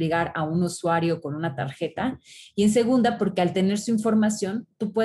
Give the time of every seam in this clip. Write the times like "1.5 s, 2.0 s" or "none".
none